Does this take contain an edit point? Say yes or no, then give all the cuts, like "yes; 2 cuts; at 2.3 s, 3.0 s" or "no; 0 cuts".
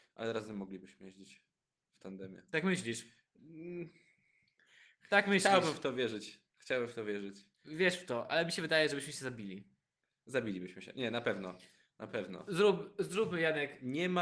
no; 0 cuts